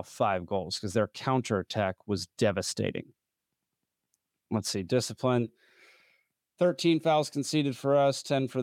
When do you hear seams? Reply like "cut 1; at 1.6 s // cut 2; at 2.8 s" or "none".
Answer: none